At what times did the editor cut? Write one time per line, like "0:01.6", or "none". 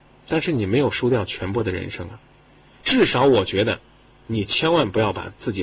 0:02.8